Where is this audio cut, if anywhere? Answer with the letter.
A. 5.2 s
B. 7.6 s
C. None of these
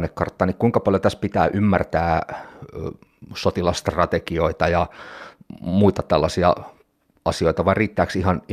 C